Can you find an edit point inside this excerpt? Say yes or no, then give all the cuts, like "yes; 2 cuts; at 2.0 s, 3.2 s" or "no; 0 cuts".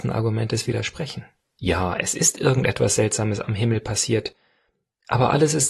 yes; 1 cut; at 1.4 s